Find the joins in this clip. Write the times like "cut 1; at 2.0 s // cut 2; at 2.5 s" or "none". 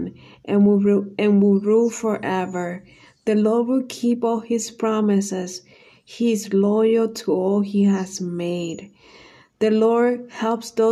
none